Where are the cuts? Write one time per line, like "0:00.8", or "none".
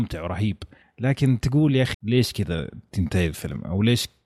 0:01.9